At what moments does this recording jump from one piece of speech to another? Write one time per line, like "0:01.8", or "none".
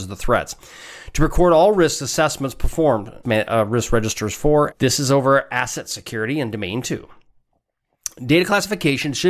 0:03.2
0:04.7